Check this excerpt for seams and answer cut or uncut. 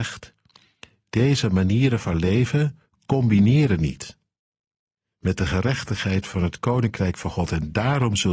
uncut